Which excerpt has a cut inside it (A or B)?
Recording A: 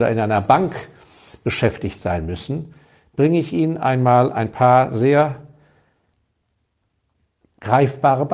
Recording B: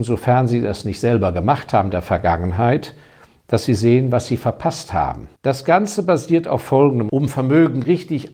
B